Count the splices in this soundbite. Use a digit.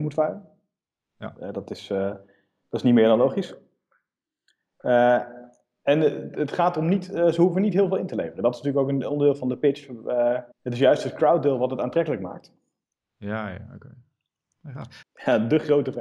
2